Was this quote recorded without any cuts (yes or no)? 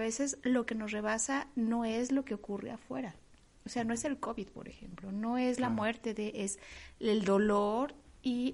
yes